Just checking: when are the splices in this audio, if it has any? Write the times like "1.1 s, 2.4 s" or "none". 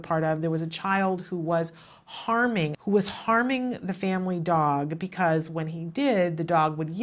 2.7 s